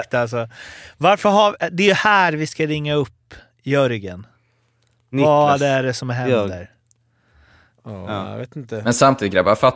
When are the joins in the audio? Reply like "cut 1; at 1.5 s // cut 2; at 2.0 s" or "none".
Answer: none

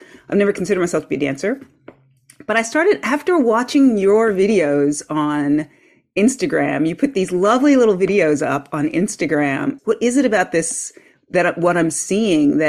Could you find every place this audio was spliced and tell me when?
cut 1; at 9.8 s

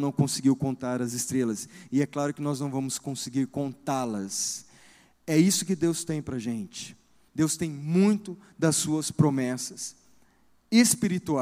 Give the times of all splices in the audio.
cut 1; at 7.3 s

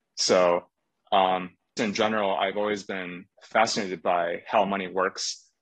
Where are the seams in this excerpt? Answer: cut 1; at 1.8 s // cut 2; at 3.3 s

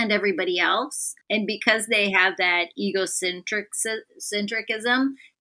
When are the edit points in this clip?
cut 1; at 1.2 s

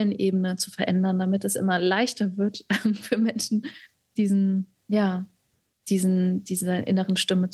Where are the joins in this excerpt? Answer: none

